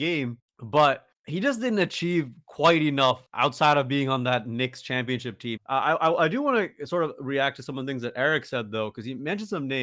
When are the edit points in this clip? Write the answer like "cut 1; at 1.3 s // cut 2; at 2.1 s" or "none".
cut 1; at 5.6 s